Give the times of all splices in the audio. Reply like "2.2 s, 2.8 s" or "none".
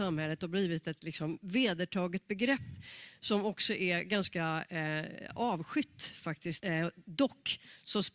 6.6 s

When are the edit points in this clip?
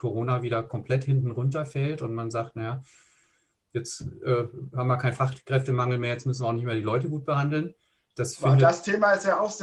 none

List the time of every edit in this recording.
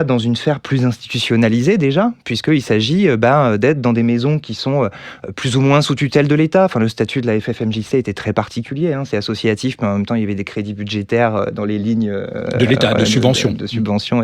none

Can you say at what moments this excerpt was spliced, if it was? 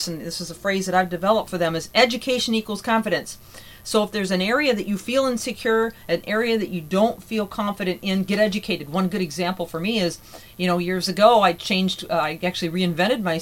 none

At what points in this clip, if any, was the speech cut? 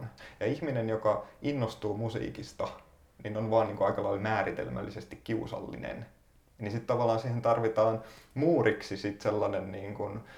none

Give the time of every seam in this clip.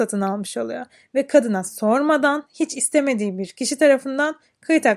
2.5 s

